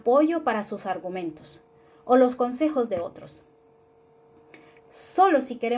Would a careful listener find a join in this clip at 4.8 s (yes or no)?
yes